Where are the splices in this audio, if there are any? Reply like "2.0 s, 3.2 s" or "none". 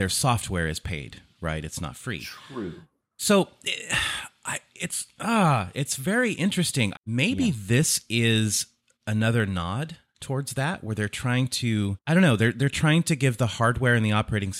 6.9 s